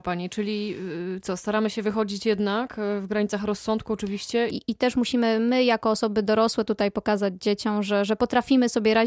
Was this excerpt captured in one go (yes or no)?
no